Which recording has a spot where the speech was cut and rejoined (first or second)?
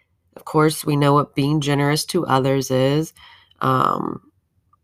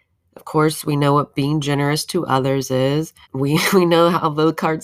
second